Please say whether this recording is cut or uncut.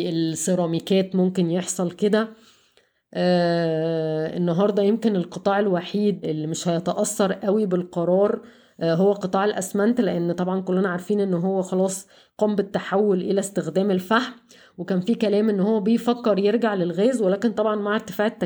cut